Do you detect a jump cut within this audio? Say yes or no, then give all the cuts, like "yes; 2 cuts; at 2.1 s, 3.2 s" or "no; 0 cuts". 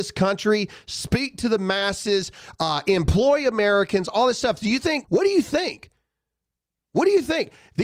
yes; 1 cut; at 5.0 s